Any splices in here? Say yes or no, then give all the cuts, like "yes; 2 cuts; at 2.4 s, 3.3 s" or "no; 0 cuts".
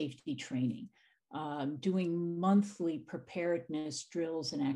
no; 0 cuts